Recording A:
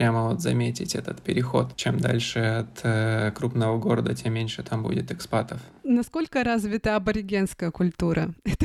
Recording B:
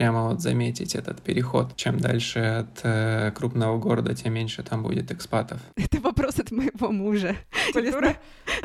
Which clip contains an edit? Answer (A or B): B